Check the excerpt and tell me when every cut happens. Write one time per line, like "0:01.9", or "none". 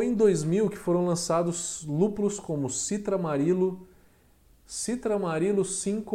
none

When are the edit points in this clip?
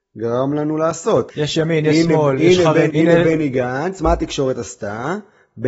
0:01.3
0:02.9

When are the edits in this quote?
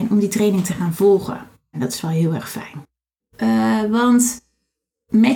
0:01.7
0:03.2

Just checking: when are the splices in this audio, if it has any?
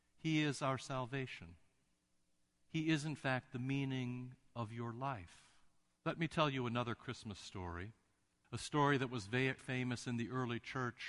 0:06.0
0:08.4
0:09.6

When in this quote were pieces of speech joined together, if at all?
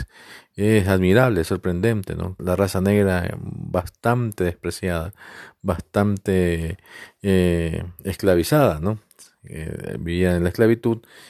0:02.4

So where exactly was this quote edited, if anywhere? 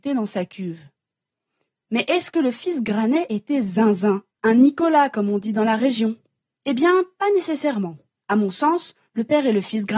0:04.3

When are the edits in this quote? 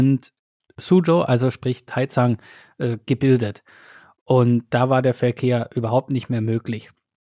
none

